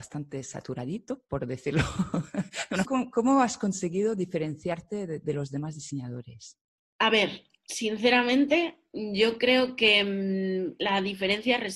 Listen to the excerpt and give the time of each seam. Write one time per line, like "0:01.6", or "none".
0:02.8

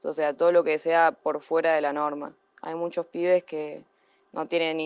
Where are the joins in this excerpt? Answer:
0:02.5

